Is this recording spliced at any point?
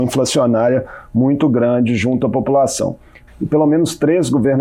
yes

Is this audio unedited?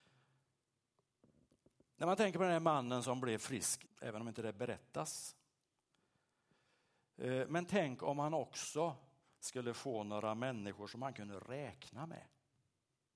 no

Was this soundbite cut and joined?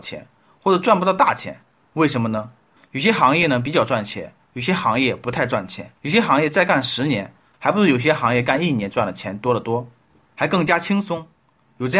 yes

